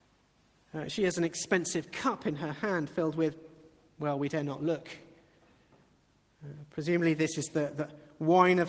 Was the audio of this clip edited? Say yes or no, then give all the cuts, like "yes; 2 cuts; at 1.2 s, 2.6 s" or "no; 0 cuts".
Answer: no; 0 cuts